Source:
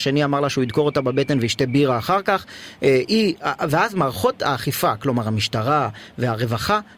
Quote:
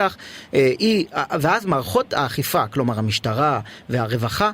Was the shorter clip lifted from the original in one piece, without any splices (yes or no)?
yes